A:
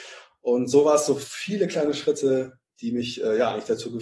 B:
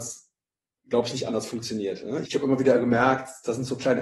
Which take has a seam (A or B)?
B